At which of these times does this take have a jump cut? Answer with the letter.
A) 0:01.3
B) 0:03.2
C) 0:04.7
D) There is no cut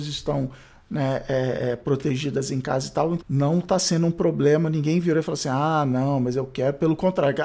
B